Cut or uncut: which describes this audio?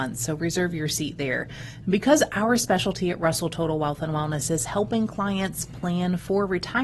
uncut